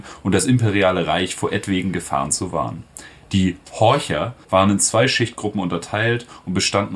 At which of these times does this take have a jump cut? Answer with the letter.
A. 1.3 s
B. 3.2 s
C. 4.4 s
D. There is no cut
C